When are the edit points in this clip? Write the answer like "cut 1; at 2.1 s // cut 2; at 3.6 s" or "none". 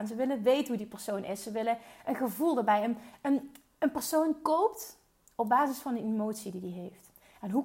none